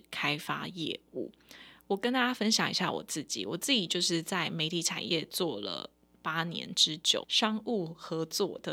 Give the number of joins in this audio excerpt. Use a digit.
1